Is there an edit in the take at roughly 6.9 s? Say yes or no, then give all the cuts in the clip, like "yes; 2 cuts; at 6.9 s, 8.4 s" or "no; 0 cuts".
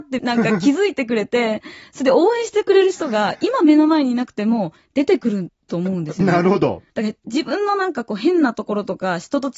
yes; 1 cut; at 6.9 s